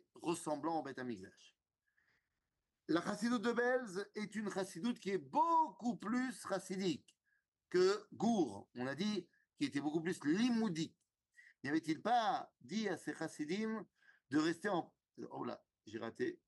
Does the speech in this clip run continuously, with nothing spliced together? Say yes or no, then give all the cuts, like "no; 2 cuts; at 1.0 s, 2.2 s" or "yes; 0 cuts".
yes; 0 cuts